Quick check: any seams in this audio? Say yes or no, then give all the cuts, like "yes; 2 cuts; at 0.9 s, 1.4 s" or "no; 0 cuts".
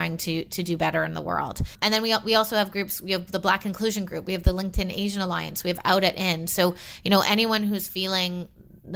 no; 0 cuts